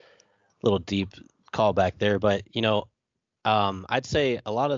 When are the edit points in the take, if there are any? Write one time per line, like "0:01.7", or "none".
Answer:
none

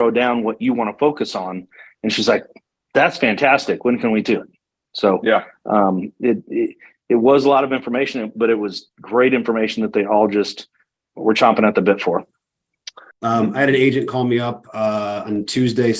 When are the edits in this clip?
0:13.1

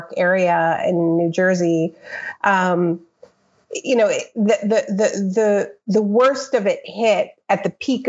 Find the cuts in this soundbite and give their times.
none

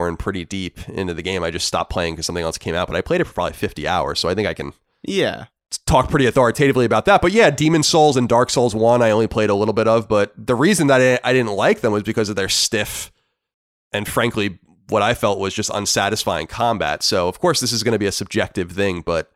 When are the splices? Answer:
none

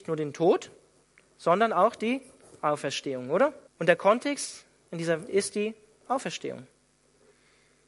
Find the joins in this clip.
0:03.7
0:05.3

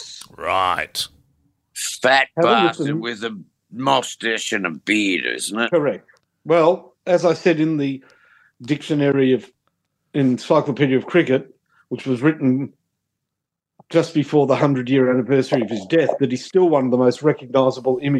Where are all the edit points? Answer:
none

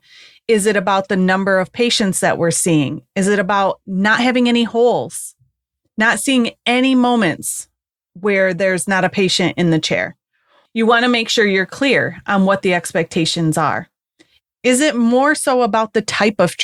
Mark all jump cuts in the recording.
0:10.6
0:14.4

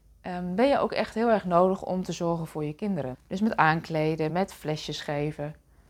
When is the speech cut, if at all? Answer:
0:03.1
0:04.3

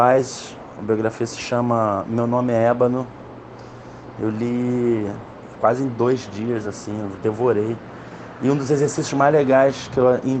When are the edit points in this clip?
none

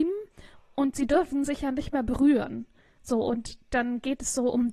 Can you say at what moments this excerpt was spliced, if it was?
none

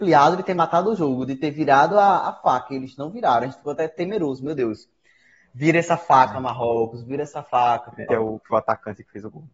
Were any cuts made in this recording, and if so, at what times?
0:08.1

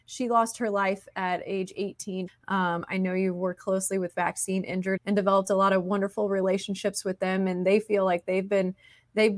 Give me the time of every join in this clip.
0:02.3
0:03.6
0:05.0

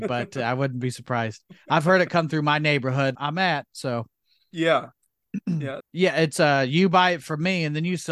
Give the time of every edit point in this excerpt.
0:03.1
0:05.8

